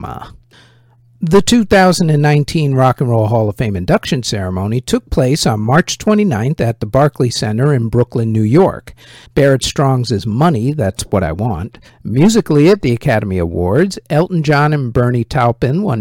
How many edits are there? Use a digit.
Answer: 2